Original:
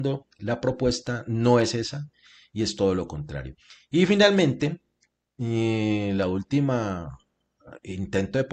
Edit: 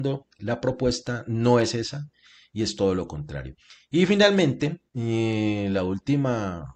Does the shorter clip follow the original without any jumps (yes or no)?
no